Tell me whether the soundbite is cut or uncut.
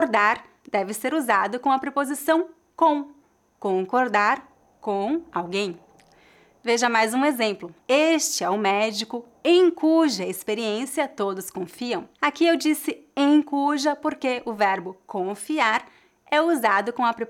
cut